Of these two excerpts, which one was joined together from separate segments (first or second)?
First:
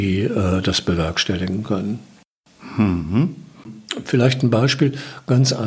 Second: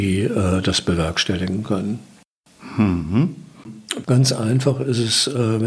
second